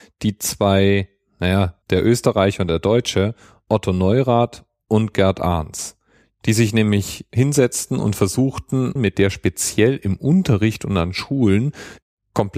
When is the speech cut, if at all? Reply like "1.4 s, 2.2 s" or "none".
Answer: 1.8 s, 9.0 s